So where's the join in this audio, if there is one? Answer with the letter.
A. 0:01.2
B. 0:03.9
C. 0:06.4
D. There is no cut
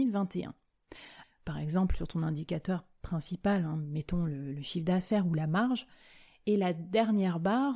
A